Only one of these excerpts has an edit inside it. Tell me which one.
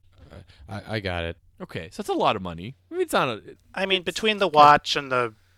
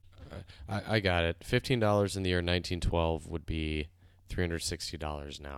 first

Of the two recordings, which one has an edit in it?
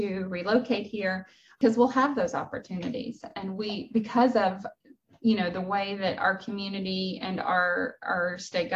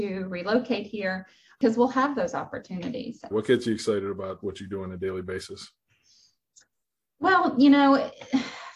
second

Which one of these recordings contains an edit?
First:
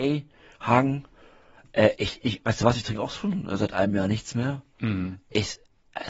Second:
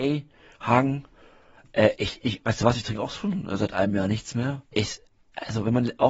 second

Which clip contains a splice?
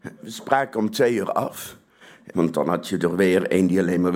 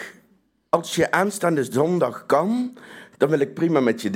first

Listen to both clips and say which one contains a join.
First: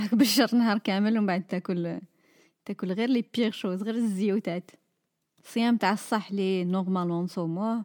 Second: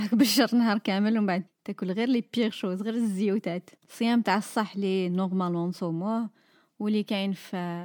second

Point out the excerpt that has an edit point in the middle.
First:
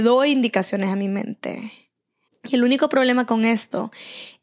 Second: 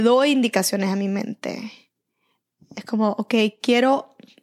first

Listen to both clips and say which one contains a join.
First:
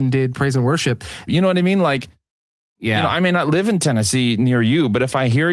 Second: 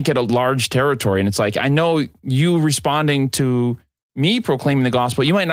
first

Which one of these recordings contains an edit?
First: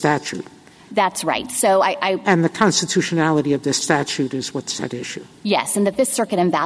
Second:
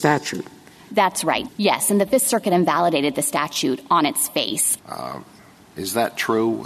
second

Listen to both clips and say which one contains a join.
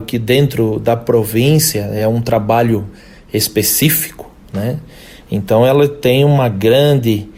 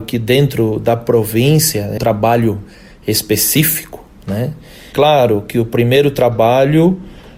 second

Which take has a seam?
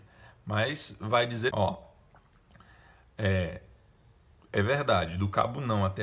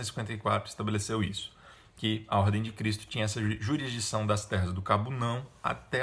first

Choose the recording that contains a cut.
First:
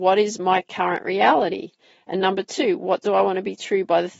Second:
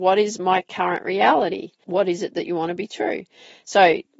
second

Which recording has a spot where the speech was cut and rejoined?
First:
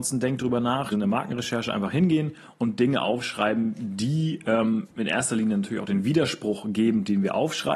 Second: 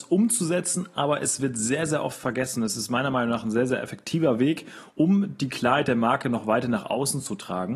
first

